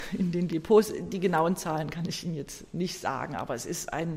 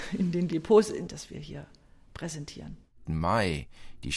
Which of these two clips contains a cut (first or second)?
second